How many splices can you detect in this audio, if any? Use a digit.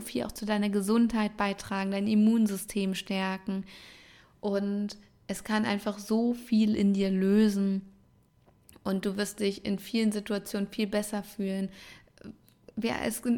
0